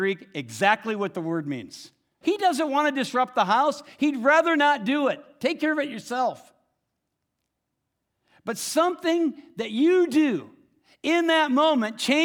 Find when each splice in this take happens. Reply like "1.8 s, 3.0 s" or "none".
2.2 s